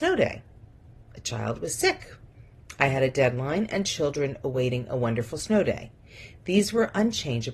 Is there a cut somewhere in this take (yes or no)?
no